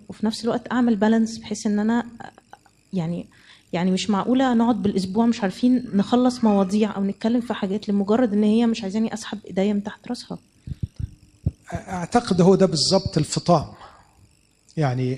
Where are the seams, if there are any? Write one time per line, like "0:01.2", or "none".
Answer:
none